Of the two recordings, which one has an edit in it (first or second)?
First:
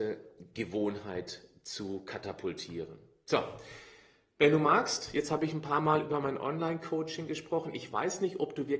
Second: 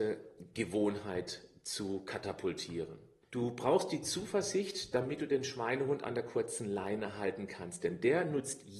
second